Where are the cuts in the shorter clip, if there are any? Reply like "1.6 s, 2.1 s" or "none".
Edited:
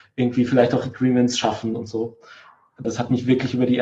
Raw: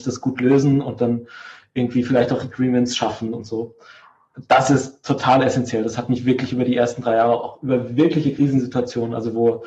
2.8 s